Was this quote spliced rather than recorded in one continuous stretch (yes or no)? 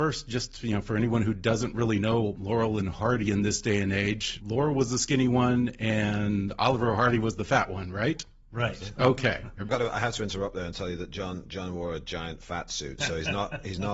yes